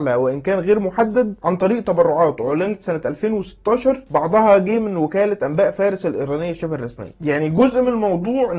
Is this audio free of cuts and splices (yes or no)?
no